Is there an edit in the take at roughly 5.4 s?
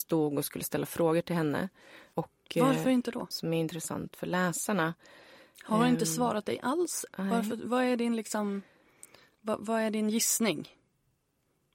no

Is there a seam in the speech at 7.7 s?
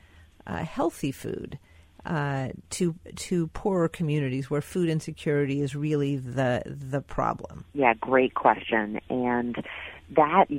yes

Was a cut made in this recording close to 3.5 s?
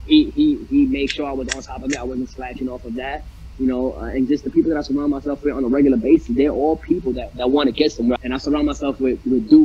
no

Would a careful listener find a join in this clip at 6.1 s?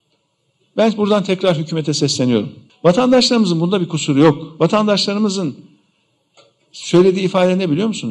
no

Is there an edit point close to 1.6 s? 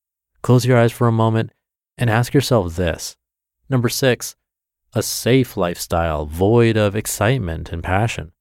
no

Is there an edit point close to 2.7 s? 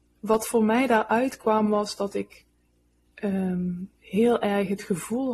no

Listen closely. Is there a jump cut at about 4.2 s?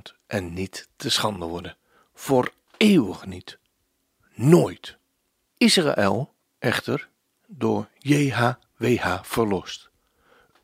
no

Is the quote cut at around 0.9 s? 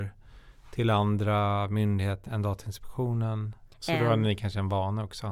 no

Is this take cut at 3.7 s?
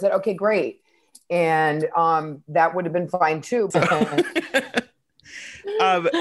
yes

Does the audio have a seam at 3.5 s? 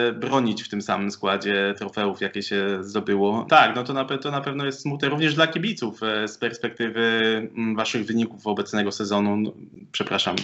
yes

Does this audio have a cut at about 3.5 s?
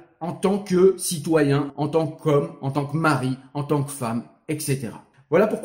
no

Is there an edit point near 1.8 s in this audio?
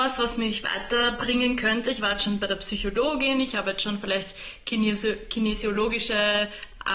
no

